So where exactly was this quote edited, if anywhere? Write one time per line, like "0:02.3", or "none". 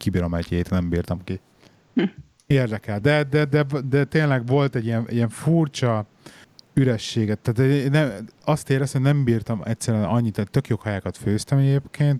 none